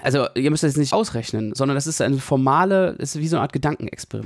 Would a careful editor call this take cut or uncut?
cut